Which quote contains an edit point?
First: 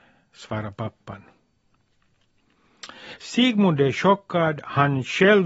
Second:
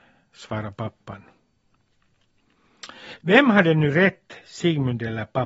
second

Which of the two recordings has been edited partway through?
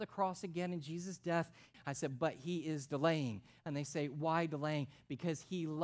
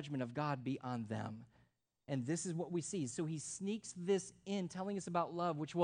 first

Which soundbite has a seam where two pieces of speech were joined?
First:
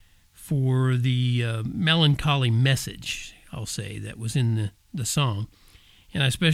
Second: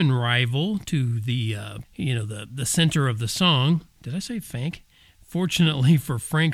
second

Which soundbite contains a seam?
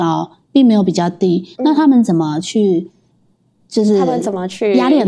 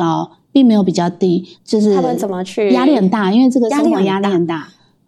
second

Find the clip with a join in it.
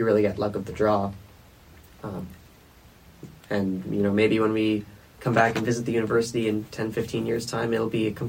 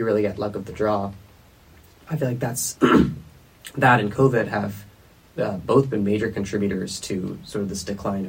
first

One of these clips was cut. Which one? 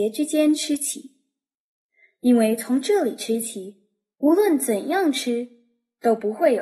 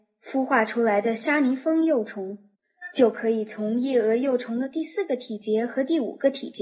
first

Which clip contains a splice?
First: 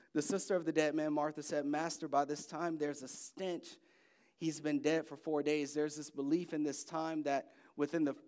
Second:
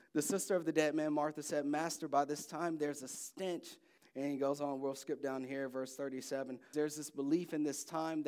second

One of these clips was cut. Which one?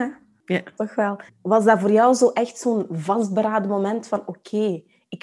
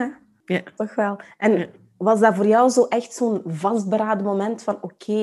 first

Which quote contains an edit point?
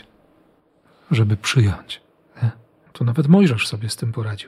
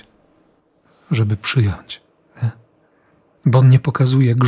first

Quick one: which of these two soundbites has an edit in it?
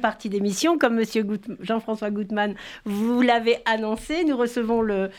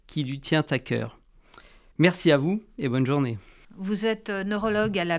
second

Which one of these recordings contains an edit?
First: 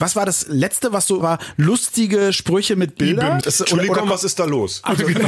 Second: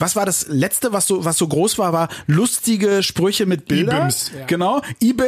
first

